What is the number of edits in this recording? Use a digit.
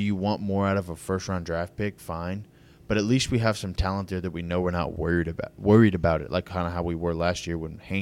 0